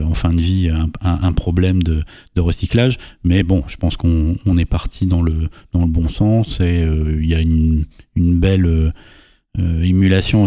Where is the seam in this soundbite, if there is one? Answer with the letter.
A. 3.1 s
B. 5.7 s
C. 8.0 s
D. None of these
D